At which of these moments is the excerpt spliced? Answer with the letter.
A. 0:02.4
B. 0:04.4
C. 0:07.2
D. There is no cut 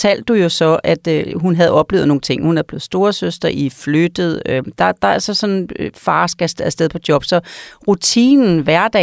D